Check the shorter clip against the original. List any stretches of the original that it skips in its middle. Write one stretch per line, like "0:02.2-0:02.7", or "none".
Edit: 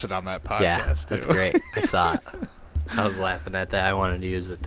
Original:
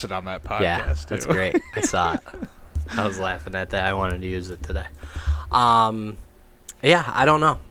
none